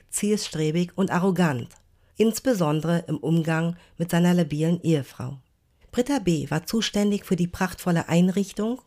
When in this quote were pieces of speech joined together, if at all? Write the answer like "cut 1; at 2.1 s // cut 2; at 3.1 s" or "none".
cut 1; at 2.1 s // cut 2; at 5.8 s